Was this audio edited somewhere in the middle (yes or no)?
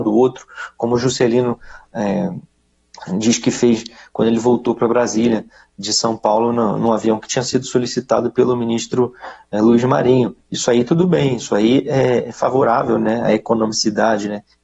no